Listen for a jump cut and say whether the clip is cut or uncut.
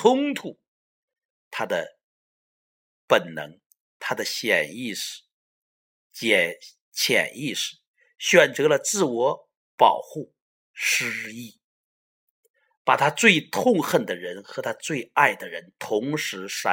cut